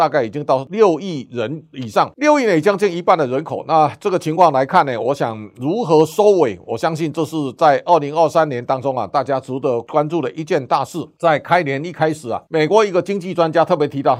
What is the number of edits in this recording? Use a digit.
0